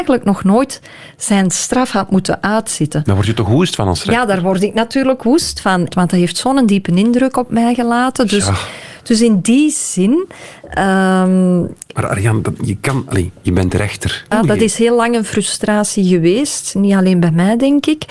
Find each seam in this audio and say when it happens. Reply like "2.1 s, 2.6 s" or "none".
5.9 s, 14.3 s